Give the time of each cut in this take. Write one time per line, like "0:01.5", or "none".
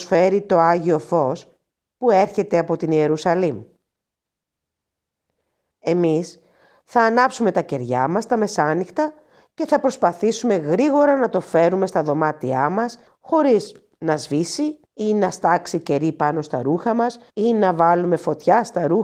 0:13.1
0:14.9
0:17.3